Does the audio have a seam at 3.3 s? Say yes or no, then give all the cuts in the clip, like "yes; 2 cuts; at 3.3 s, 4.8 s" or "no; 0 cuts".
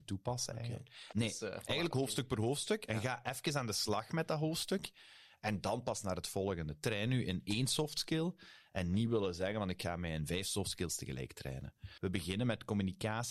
no; 2 cuts; at 1.1 s, 12.0 s